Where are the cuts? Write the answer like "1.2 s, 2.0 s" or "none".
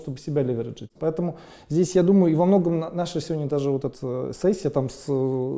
1.0 s, 3.9 s